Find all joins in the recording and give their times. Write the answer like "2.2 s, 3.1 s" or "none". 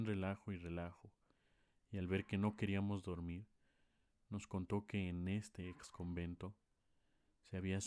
none